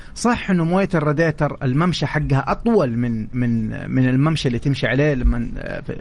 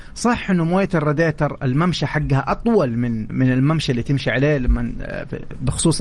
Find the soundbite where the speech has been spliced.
second; 1 cut; at 3.3 s

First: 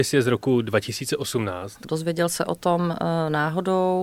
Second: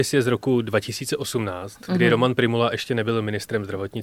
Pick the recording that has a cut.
first; 1 cut; at 1.8 s

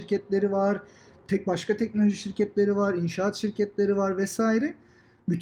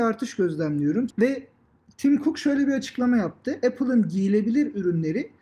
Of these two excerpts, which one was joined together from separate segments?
second; 1 cut; at 1.1 s

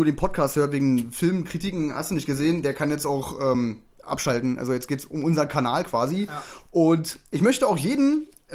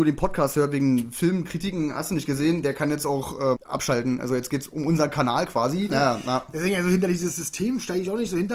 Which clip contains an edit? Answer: second; 2 cuts; at 3.5 s, 5.9 s

